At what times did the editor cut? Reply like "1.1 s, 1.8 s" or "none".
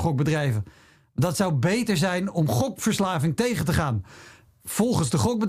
none